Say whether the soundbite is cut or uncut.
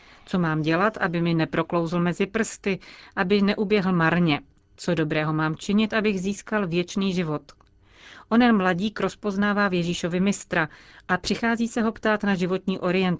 cut